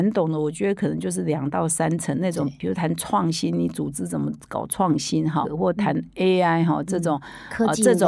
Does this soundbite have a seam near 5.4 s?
yes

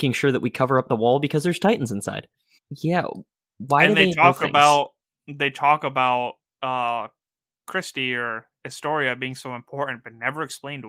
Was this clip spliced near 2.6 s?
yes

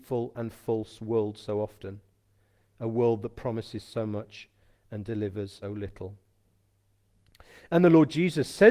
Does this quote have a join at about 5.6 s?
yes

